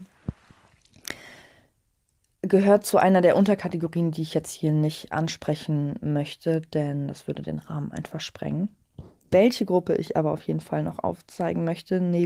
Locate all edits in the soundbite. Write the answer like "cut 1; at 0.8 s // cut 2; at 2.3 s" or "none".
none